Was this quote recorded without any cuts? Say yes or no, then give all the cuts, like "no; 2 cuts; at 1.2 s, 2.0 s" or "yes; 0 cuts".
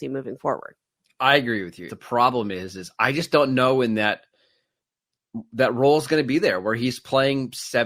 no; 1 cut; at 1.9 s